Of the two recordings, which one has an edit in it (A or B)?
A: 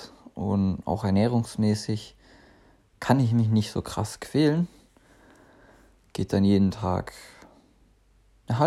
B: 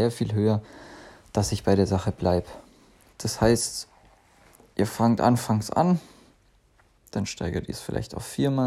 B